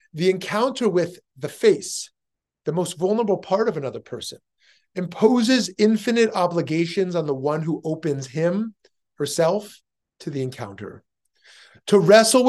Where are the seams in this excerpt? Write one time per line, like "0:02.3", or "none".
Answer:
none